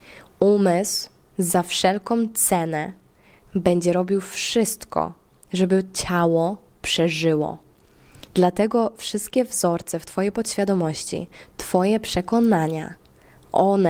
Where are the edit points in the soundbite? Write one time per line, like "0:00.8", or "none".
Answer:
0:08.3